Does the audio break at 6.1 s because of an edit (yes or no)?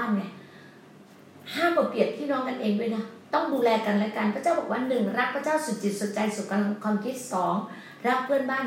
no